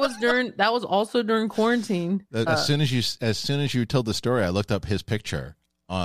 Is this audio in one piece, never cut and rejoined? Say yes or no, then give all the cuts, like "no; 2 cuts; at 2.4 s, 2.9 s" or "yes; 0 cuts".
no; 1 cut; at 2.5 s